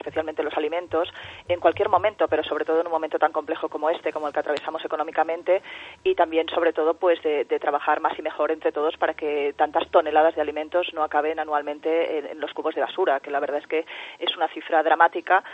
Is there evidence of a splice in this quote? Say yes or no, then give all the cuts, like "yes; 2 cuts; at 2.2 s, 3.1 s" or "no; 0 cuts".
no; 0 cuts